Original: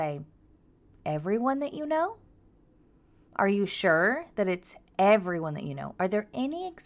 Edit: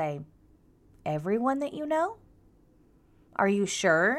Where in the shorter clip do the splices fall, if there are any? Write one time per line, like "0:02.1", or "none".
none

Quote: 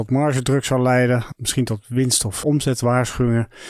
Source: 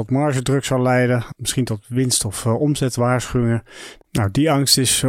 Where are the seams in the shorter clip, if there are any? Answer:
0:02.4

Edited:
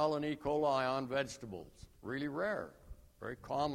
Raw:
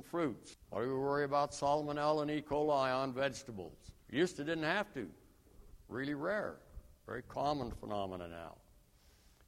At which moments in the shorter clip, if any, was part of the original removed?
0:02.0

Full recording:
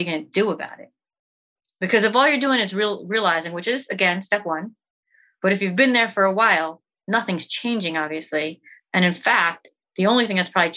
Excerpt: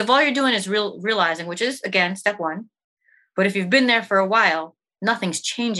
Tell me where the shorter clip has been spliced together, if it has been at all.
none

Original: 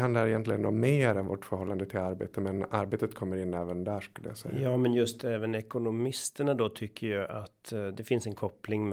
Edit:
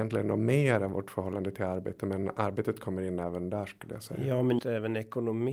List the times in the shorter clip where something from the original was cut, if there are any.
0:04.6

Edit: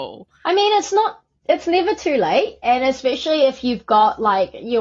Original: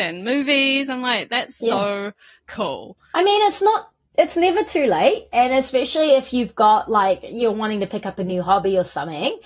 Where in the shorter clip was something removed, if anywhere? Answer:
none

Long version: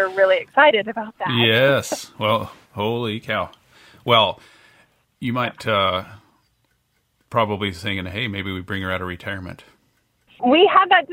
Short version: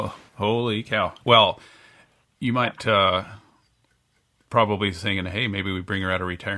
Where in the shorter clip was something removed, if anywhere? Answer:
0:01.2

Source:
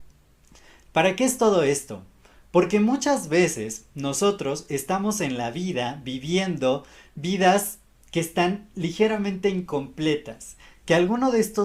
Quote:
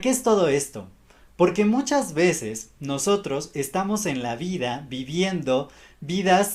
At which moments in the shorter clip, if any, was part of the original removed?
none

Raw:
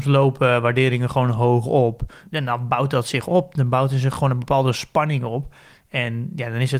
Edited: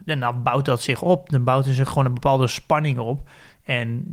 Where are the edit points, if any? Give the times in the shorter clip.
none

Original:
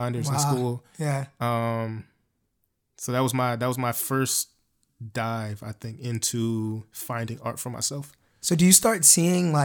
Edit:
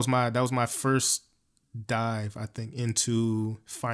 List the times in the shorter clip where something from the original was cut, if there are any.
none

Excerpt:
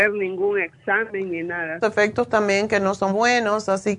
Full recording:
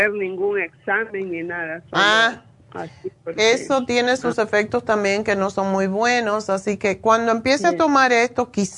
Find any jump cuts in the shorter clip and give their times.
0:01.8
0:03.1

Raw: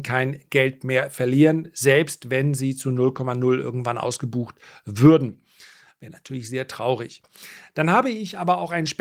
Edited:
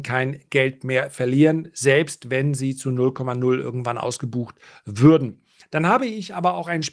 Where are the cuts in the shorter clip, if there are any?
0:05.6

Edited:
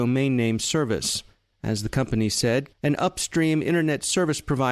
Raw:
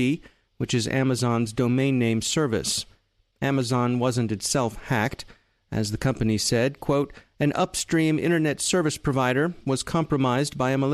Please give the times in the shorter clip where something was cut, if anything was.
0:01.5
0:02.7

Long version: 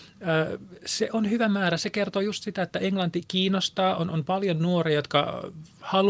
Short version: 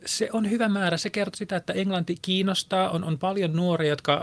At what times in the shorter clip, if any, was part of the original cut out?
0:01.3

